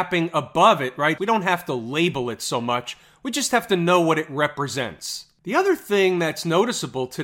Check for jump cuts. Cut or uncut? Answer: cut